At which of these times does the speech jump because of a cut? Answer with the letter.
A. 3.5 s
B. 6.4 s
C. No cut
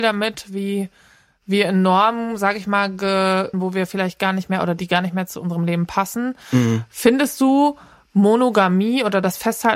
A